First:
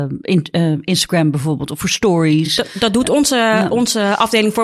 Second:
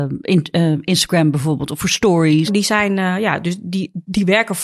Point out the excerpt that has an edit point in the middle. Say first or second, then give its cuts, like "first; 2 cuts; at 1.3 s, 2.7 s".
second; 1 cut; at 2.5 s